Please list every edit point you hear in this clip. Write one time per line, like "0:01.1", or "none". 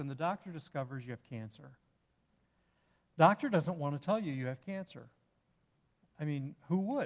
none